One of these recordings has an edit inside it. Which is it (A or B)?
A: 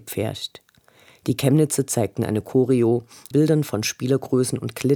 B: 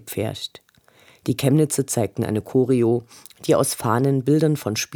A